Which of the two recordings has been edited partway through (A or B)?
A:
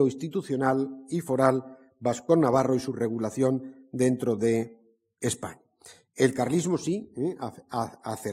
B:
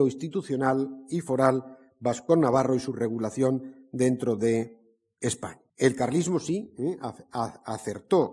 B